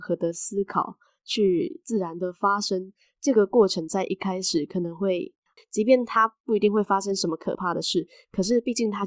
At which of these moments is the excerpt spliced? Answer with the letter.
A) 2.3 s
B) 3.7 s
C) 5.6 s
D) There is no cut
C